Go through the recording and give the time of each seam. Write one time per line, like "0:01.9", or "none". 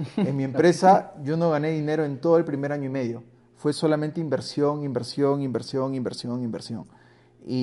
none